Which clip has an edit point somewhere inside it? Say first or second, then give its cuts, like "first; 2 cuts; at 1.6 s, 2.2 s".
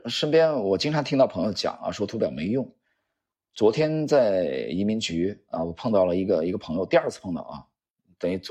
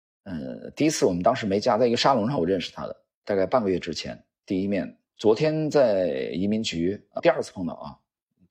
second; 2 cuts; at 5.1 s, 7.2 s